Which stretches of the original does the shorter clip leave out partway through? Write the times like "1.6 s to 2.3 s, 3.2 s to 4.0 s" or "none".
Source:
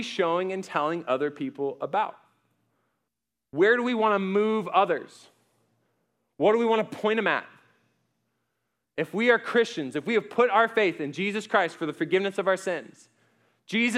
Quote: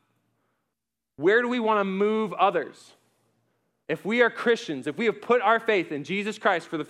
6.2 s to 8.9 s